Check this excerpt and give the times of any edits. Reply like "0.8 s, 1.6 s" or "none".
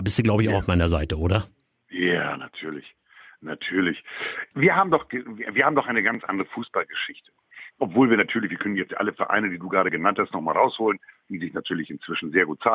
none